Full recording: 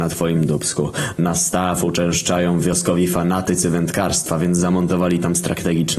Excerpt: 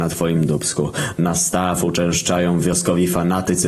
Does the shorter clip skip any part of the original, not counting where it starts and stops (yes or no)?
no